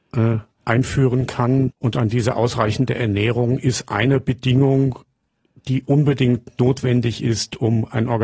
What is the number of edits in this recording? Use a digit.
1